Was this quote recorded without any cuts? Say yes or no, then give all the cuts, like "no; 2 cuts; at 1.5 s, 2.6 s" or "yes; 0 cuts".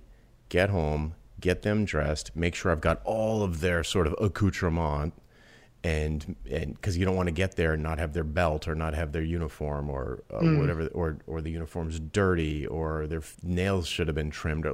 no; 1 cut; at 13.3 s